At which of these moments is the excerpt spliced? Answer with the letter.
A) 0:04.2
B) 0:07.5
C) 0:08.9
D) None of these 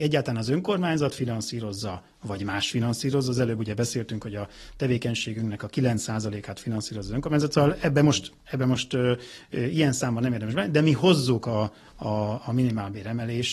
D